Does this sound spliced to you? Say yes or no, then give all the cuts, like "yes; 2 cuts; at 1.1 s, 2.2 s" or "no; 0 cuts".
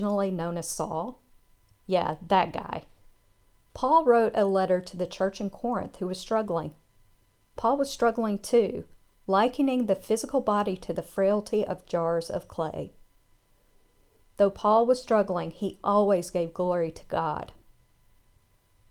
no; 0 cuts